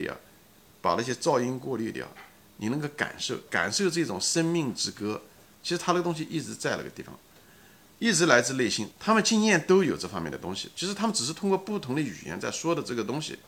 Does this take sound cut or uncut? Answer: cut